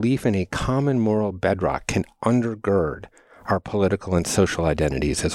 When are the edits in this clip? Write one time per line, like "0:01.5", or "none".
none